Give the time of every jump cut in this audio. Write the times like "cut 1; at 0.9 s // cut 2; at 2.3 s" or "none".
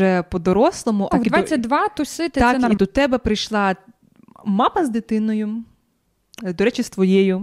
cut 1; at 1.1 s // cut 2; at 2.8 s